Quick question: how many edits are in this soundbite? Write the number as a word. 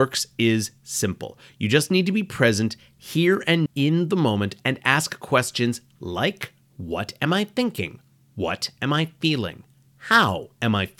one